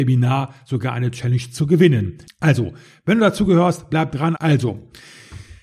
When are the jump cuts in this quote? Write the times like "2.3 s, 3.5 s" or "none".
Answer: 2.3 s, 4.3 s

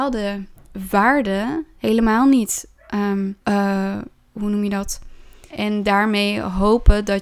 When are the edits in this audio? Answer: 3.4 s, 5.5 s

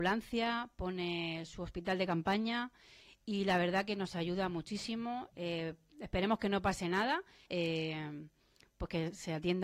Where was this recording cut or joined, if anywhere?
5.3 s, 7.5 s

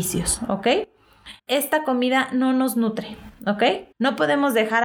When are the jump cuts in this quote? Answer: 1.4 s, 3.9 s

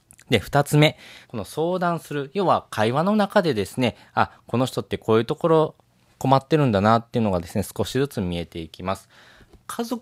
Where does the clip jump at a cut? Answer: 1.2 s

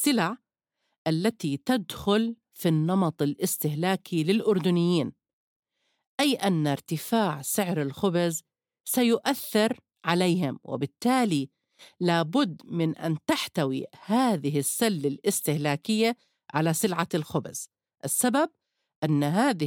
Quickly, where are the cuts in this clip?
none

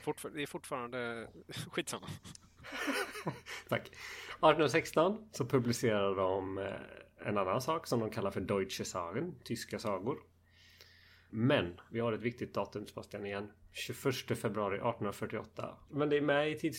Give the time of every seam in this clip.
11.3 s, 15.9 s

